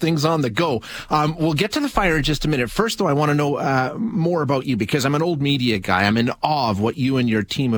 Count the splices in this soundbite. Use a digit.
0